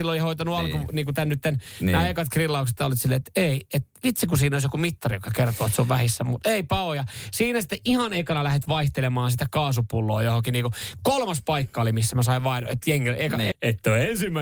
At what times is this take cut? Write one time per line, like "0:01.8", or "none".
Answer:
0:13.5